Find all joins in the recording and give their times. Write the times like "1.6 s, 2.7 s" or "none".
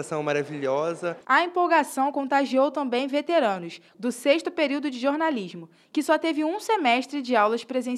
1.2 s, 3.9 s